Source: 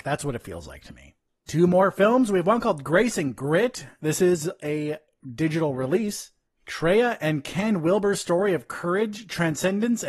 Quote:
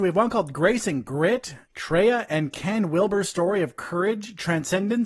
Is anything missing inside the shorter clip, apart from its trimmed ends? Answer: yes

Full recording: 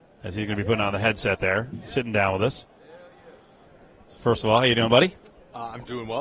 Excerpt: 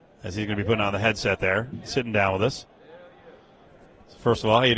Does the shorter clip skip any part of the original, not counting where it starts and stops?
no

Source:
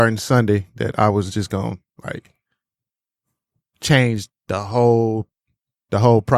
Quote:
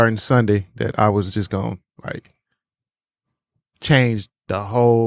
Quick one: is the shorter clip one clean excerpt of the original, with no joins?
yes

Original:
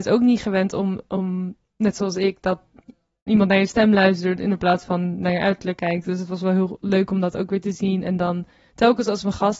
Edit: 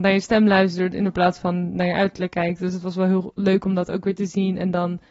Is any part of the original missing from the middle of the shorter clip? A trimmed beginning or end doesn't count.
no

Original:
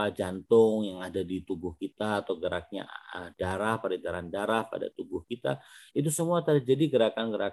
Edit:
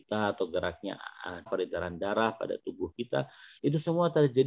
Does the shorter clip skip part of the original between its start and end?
yes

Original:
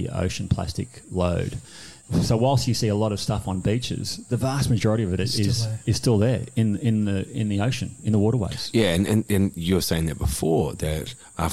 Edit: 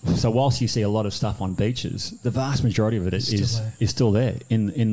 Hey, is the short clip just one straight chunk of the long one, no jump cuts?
yes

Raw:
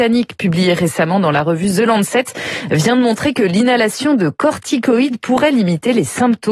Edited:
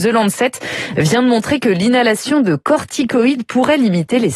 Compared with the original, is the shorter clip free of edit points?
yes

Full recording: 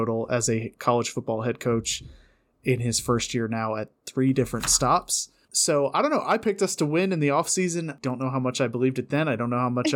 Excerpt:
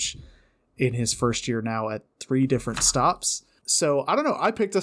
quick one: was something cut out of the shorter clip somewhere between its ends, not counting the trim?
no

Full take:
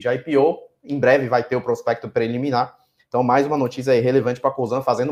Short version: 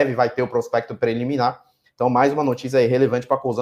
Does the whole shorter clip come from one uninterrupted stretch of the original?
yes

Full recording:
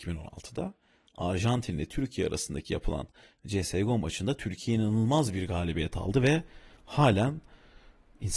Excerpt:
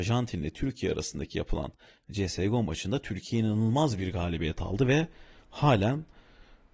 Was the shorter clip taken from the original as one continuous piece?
yes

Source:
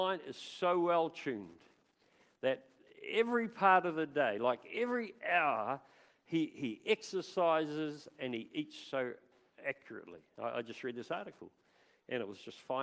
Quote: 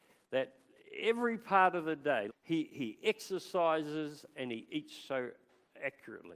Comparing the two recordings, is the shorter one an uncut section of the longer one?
no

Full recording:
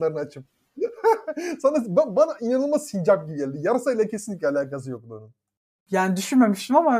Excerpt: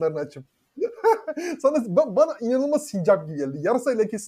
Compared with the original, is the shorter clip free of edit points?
yes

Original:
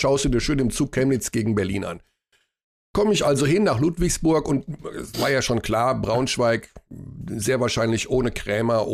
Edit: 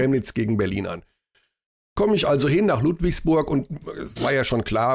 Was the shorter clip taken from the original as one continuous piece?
yes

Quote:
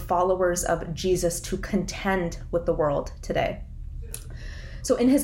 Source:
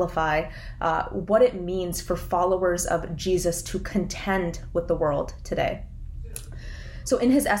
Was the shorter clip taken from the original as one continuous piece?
yes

